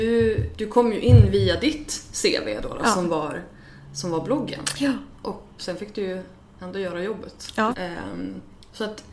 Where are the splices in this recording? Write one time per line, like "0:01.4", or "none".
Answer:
0:05.6
0:07.7